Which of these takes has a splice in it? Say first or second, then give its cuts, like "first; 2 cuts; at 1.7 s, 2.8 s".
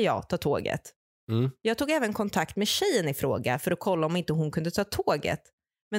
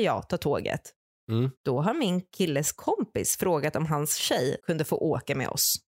second; 2 cuts; at 1.6 s, 4.6 s